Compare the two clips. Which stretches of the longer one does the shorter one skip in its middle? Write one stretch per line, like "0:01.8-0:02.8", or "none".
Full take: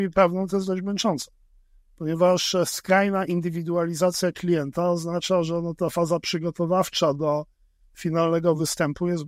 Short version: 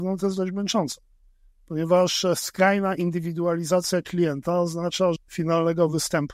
0:05.5-0:07.8